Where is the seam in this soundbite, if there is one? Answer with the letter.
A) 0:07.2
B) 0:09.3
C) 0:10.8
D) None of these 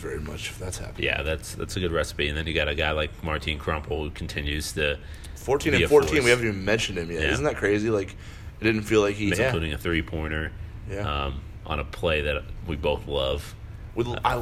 B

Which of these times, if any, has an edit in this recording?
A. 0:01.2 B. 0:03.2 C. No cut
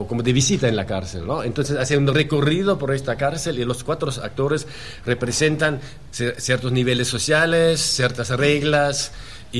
C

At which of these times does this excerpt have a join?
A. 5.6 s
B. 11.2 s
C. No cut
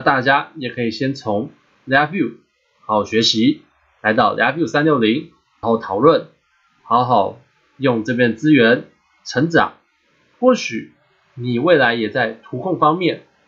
A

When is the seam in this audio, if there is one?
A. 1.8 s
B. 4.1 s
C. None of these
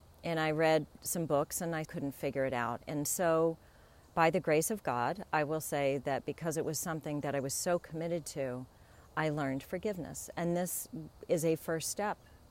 A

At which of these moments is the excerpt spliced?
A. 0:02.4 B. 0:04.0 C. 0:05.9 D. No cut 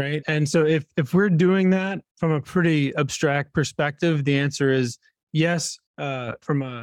C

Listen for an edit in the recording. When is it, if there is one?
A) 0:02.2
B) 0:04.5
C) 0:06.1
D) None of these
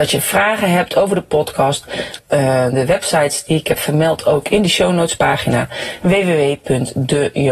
A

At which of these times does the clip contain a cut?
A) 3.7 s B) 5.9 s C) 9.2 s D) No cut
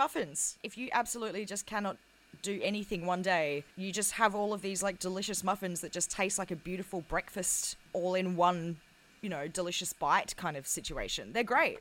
A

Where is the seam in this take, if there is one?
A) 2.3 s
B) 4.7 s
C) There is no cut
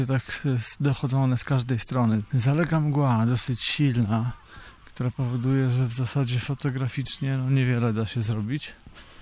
A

